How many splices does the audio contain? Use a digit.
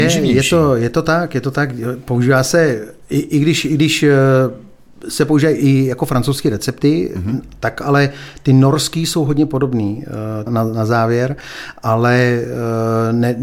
1